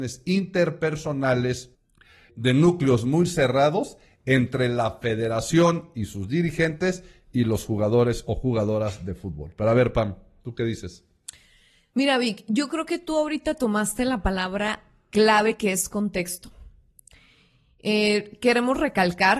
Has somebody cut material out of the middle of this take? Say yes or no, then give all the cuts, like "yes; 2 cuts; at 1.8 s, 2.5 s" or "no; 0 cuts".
no; 0 cuts